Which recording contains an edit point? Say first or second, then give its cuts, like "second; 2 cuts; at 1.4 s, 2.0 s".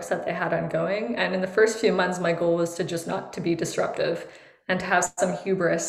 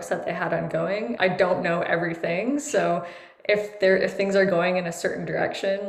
second; 1 cut; at 1.2 s